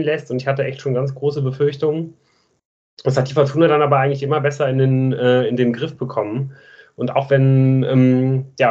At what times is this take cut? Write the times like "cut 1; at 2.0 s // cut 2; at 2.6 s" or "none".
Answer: none

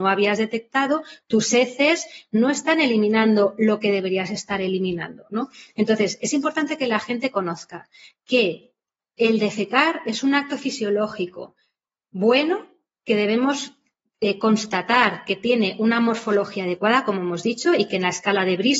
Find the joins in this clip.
none

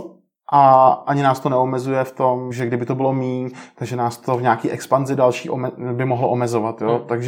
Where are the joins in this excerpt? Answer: cut 1; at 2.5 s

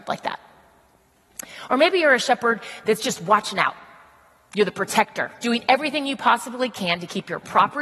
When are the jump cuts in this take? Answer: cut 1; at 5.4 s

